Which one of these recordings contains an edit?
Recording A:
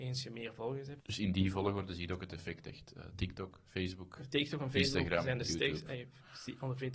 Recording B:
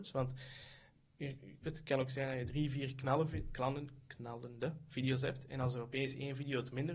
A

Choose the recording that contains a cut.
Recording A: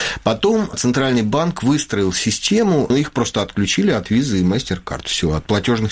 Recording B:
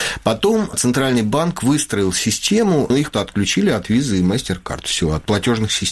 B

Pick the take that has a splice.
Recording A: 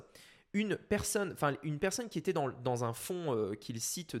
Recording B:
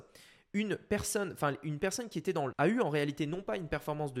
B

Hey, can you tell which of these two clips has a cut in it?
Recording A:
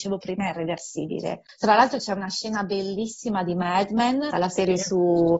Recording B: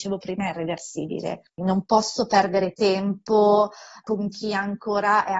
A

